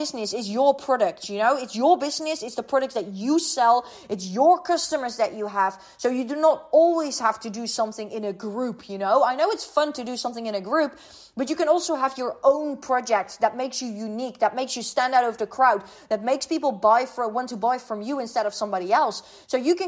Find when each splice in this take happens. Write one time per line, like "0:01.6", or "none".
none